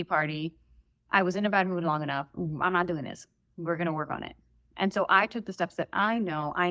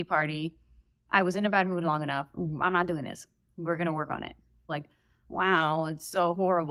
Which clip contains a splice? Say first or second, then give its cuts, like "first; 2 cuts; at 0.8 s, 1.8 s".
second; 1 cut; at 4.7 s